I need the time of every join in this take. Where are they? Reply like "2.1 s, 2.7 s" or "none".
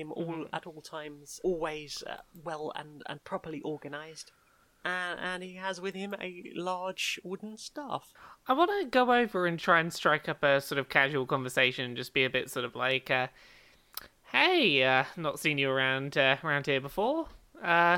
1.4 s, 9.6 s